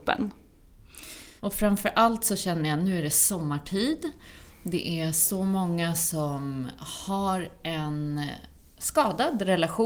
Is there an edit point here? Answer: yes; 1 cut; at 1.4 s

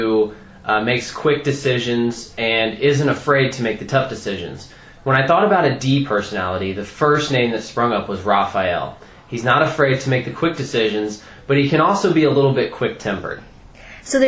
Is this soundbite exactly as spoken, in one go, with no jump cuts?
yes; 0 cuts

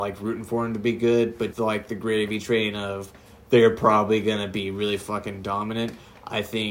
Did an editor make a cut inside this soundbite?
yes; 1 cut; at 1.5 s

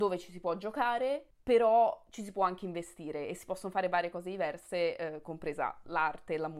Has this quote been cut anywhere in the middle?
no; 0 cuts

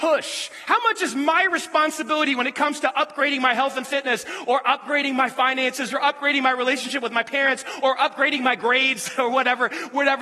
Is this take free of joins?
no; 1 cut; at 5.9 s

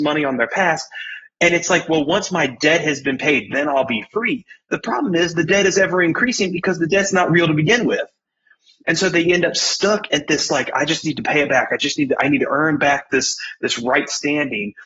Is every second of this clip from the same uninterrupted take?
yes; 0 cuts

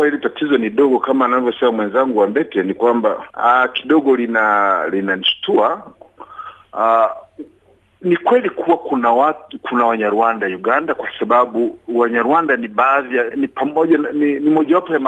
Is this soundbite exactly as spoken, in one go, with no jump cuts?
no; 2 cuts; at 3.3 s, 13.3 s

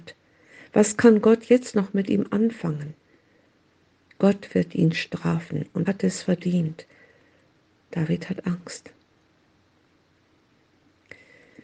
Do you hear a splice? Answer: yes; 1 cut; at 5.9 s

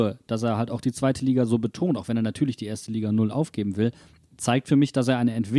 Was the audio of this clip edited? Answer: no; 0 cuts

